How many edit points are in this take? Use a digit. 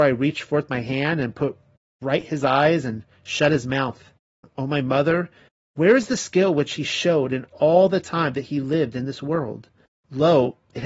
1